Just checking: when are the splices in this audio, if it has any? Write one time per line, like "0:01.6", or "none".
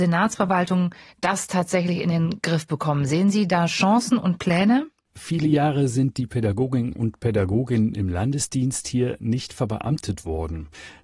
0:05.1